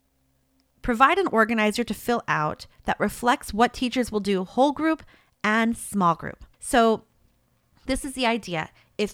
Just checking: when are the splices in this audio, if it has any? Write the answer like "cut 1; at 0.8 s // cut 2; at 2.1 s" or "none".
cut 1; at 6.5 s

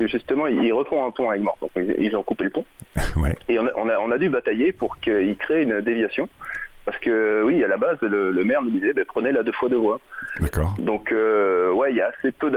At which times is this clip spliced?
none

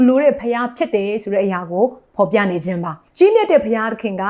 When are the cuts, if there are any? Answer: cut 1; at 3.1 s

